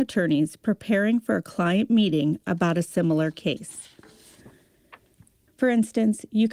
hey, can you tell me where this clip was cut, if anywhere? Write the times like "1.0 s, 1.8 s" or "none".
5.5 s